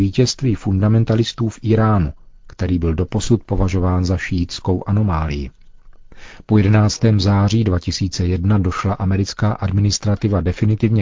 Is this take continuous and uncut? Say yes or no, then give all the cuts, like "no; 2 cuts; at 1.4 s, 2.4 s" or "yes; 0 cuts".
yes; 0 cuts